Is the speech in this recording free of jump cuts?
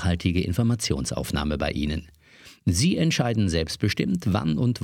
yes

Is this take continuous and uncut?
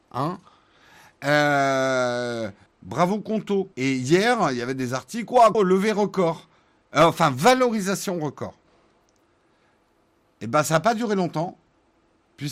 no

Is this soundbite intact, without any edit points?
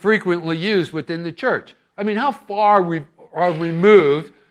no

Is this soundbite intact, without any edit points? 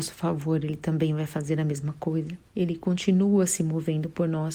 yes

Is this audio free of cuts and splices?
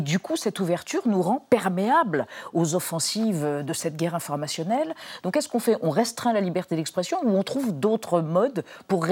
no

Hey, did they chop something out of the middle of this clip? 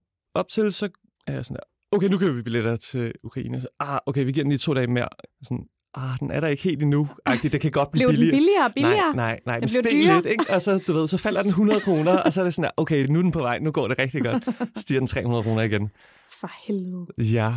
no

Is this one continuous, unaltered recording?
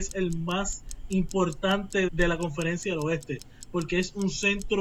no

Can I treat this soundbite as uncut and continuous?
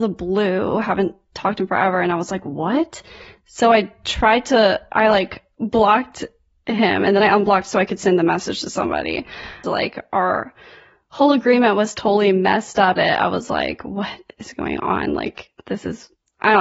no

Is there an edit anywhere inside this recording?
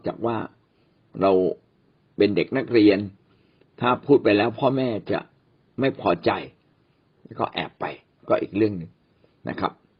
no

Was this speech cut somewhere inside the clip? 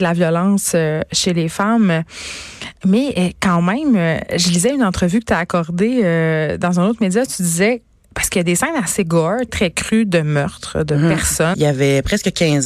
yes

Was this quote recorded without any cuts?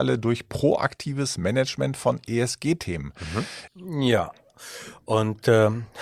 no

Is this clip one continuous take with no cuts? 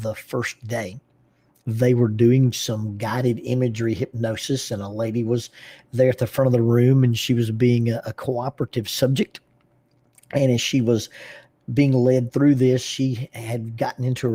yes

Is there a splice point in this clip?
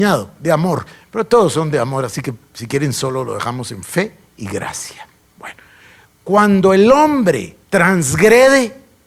yes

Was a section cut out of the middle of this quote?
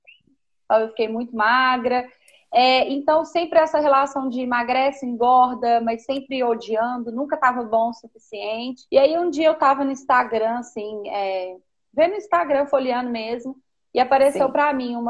yes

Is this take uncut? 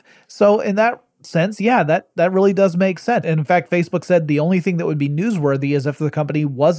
no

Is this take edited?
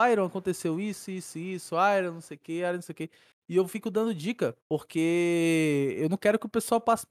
yes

